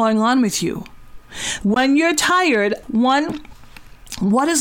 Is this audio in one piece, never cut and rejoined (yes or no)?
no